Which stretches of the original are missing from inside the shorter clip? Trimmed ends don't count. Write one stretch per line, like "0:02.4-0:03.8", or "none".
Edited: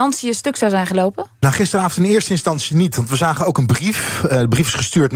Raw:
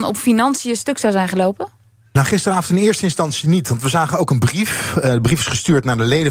0:01.8-0:02.1